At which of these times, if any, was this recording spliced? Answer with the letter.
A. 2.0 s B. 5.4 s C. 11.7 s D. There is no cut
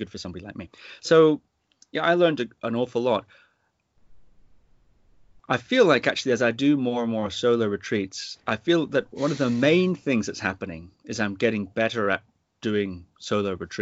B